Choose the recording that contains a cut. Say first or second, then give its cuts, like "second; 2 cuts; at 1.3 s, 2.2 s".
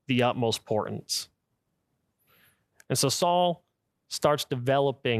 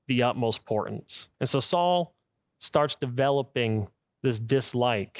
second; 1 cut; at 1.3 s